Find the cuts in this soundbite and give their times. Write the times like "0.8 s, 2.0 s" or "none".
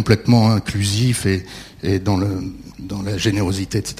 2.7 s